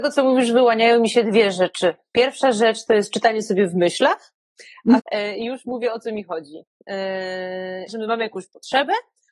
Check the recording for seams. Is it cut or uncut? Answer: cut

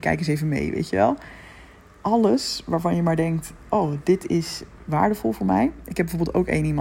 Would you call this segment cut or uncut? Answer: uncut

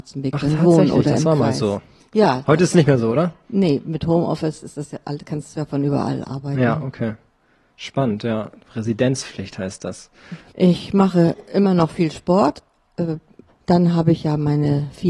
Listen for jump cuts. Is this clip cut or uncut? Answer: cut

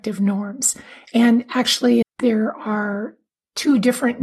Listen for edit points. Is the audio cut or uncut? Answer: cut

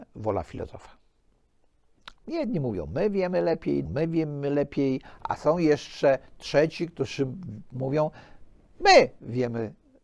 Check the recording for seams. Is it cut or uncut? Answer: cut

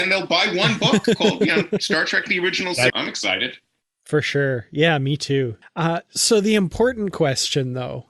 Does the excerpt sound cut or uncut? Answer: cut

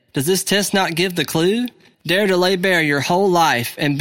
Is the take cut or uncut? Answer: cut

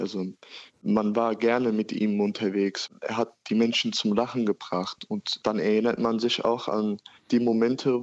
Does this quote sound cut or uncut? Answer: uncut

